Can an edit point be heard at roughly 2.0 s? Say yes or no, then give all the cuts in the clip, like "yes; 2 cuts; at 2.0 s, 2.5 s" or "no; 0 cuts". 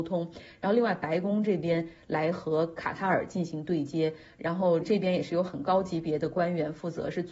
no; 1 cut; at 4.8 s